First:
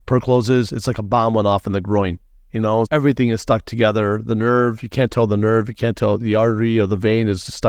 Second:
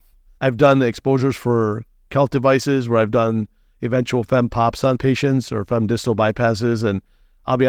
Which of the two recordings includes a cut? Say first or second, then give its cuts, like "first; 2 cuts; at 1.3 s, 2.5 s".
first; 1 cut; at 2.9 s